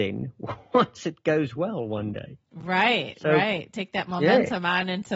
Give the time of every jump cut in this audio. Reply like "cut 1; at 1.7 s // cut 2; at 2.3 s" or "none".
none